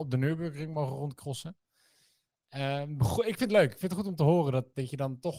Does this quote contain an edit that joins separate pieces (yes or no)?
no